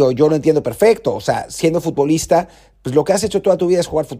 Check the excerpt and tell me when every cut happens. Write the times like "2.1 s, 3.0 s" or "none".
none